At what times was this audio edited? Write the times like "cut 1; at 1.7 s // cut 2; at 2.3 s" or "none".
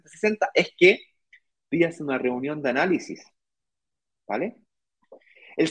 none